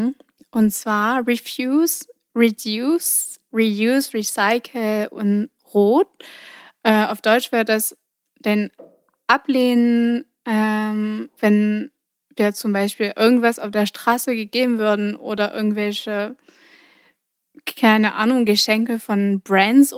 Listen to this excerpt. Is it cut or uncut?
uncut